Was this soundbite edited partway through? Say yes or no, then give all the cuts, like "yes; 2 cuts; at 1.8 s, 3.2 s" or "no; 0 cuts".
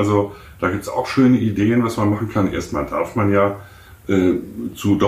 no; 0 cuts